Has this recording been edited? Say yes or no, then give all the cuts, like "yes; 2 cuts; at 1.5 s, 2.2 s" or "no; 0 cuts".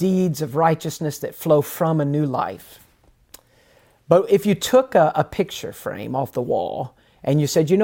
no; 0 cuts